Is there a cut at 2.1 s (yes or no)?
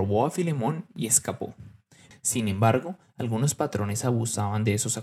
yes